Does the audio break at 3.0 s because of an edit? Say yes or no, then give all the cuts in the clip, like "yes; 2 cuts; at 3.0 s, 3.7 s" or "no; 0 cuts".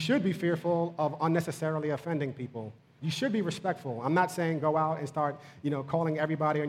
yes; 1 cut; at 3.0 s